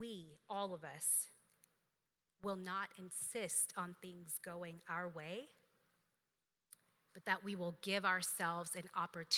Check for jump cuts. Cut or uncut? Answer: uncut